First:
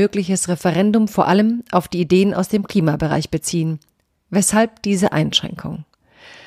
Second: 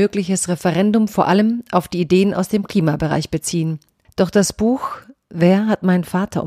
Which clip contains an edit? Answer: second; 1 cut; at 4.0 s

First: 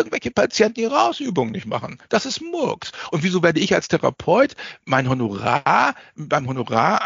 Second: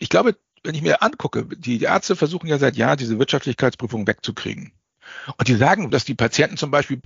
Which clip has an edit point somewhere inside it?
second; 1 cut; at 5.9 s

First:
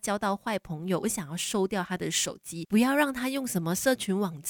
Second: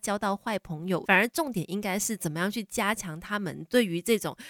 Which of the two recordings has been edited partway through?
second; 1 cut; at 1.0 s

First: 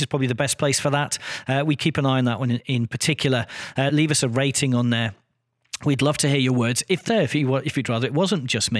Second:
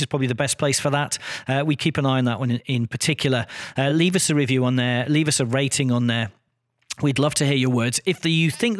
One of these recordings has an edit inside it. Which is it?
first; 2 cuts; at 3.9 s, 7.1 s

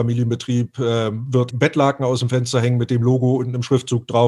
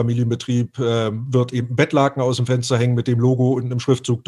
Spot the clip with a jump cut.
first; 1 cut; at 1.5 s

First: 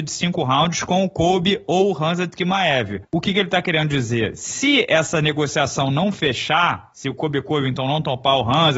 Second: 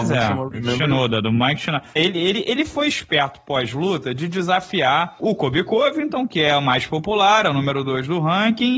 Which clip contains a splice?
second; 1 cut; at 2.0 s

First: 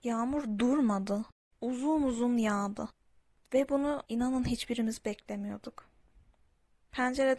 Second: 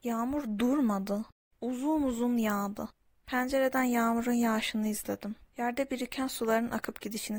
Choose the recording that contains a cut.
second; 1 cut; at 3.1 s

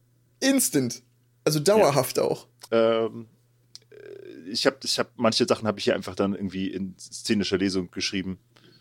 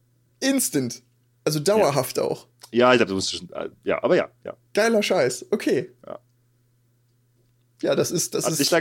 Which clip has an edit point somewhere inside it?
first; 1 cut; at 2.7 s

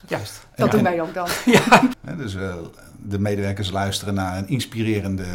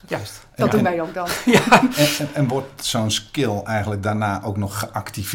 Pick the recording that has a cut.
first; 1 cut; at 1.9 s

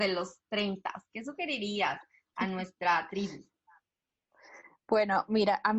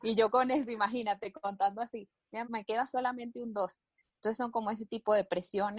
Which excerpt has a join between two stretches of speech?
second; 2 cuts; at 2.4 s, 4.0 s

